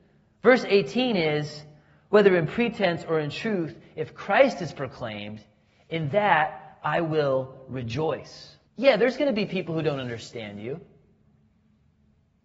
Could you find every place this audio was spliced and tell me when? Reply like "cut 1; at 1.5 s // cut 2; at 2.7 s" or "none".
cut 1; at 8.7 s